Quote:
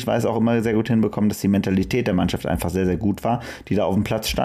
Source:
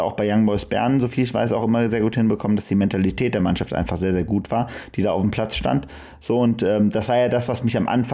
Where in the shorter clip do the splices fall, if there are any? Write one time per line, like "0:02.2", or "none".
none